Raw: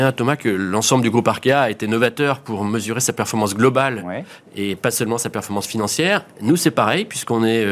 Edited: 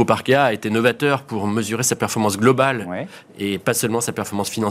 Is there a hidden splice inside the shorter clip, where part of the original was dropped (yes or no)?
no